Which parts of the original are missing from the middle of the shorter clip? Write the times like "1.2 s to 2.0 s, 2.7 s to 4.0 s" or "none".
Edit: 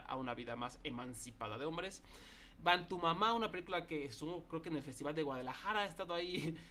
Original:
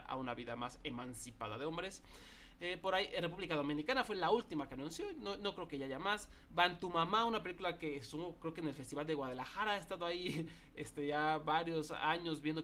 2.5 s to 6.4 s